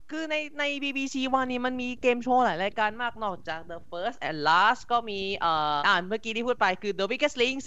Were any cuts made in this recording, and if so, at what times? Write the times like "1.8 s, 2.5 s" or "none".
5.8 s